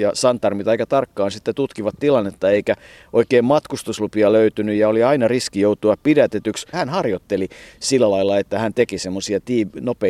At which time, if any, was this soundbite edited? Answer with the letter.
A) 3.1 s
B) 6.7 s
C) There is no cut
B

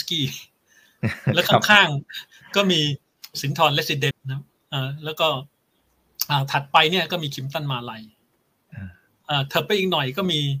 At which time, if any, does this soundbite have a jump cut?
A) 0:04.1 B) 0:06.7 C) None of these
A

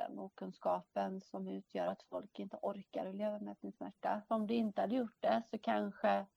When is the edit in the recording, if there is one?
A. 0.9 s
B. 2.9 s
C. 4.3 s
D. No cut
C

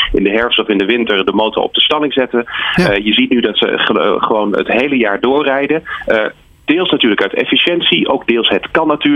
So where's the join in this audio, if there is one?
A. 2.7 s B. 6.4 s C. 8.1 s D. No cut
D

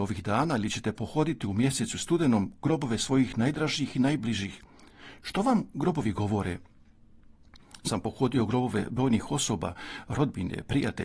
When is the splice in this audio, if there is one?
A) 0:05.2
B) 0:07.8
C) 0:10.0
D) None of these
B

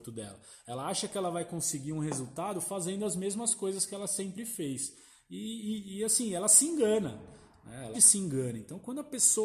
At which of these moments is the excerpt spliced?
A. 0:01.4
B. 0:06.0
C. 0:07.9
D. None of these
C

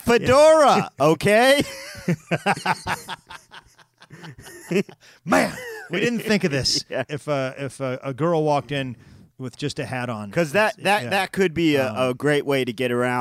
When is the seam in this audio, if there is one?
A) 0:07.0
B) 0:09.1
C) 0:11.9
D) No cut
A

